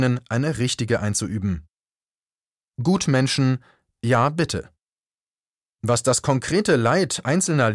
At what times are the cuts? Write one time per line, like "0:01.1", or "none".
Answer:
none